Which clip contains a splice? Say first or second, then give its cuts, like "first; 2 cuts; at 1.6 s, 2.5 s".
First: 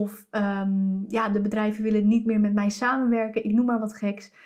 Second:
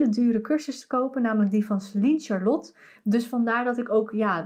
second; 1 cut; at 3.0 s